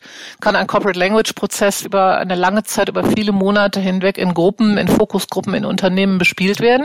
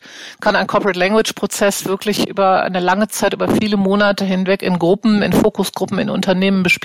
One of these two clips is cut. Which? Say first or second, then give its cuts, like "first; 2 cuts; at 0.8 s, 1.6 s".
first; 1 cut; at 1.8 s